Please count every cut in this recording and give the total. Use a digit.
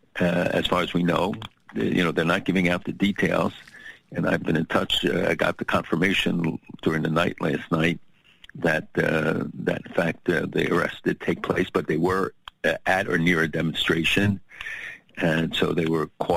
0